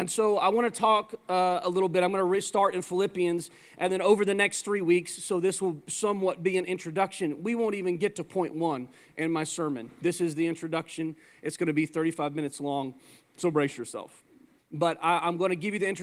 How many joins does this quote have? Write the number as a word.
one